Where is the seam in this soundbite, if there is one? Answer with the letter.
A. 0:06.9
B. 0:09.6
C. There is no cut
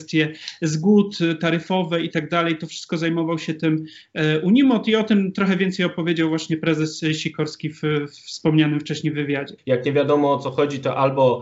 B